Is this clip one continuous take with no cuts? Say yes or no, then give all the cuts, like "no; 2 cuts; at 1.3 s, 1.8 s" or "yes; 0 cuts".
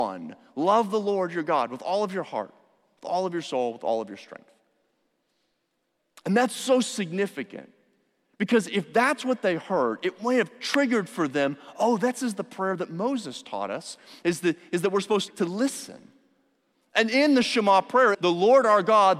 no; 2 cuts; at 15.3 s, 18.1 s